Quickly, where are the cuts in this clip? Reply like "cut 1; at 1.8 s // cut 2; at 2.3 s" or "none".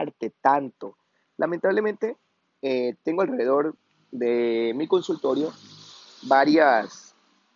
none